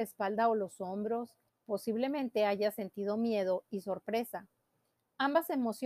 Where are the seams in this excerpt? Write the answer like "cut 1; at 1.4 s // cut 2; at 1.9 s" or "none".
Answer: cut 1; at 1.5 s